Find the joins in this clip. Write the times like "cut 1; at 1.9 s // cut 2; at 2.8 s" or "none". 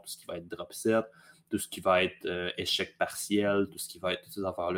none